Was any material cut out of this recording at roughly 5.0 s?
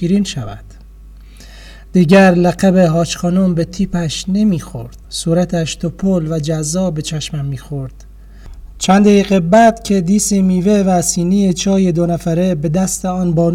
yes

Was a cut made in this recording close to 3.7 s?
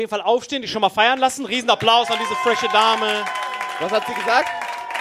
no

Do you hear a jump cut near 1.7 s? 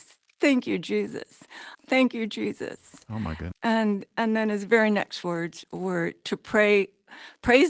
yes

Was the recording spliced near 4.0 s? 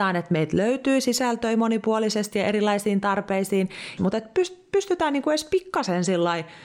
yes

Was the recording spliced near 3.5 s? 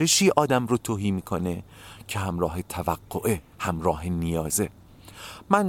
yes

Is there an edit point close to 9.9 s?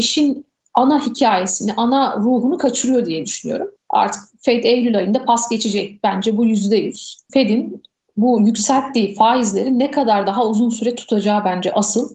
no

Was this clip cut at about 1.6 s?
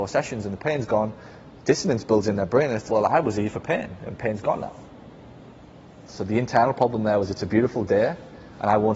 no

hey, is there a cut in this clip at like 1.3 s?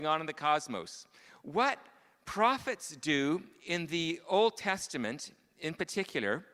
yes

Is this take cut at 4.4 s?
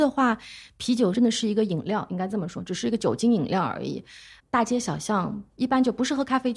no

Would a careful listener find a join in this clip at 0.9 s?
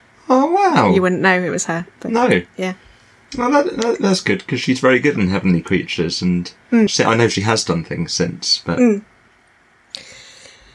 no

